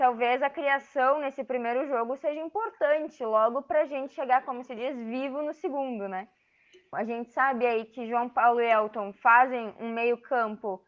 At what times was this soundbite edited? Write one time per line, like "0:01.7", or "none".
0:06.9
0:09.8

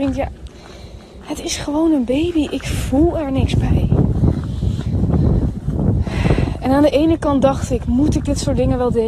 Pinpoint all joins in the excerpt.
none

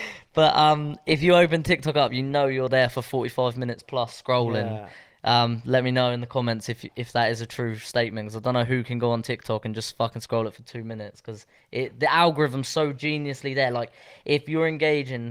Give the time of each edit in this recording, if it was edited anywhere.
none

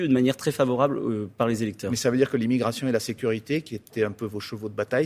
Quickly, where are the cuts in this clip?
none

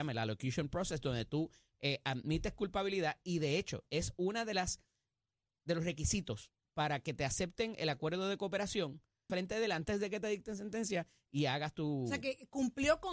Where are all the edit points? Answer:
0:09.3

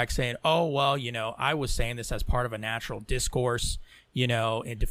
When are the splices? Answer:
none

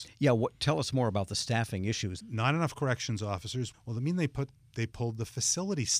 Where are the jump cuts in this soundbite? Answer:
0:02.2
0:03.7

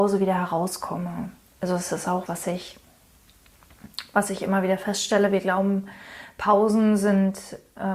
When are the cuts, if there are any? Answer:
0:02.3

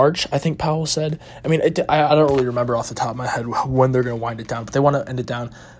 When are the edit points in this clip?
none

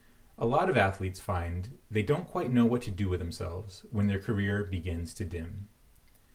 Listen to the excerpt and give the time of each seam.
none

